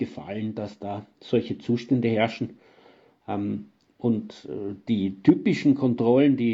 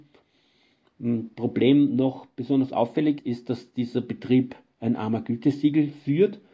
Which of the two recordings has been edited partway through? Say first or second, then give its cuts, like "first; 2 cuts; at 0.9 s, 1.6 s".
second; 1 cut; at 3.2 s